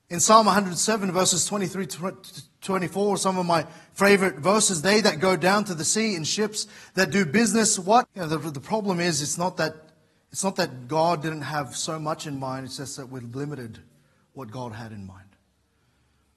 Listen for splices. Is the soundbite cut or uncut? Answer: cut